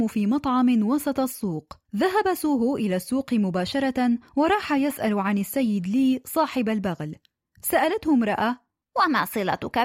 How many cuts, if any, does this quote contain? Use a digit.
1